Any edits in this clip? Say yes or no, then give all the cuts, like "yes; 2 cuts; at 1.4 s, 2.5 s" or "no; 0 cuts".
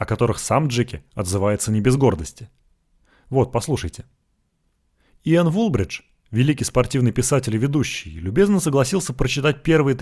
no; 0 cuts